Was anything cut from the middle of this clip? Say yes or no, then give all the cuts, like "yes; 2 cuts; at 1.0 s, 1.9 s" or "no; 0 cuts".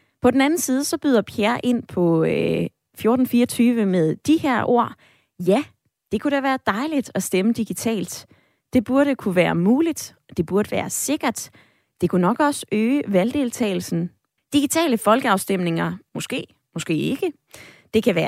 yes; 2 cuts; at 14.4 s, 16.1 s